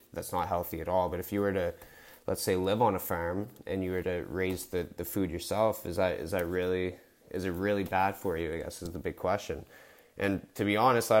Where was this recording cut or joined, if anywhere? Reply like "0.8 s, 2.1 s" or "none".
none